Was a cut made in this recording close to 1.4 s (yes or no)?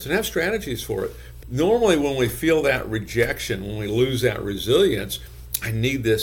yes